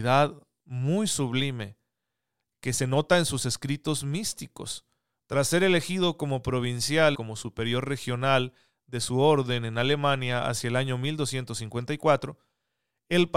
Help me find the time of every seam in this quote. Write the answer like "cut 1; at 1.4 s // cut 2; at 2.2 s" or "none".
cut 1; at 5.2 s // cut 2; at 7.1 s